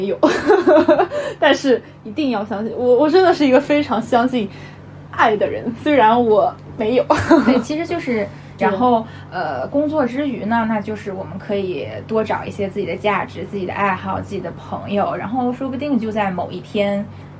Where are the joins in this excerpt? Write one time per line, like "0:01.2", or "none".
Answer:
0:08.6